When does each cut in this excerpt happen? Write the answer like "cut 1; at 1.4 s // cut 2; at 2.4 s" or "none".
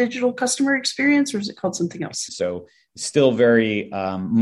cut 1; at 2.3 s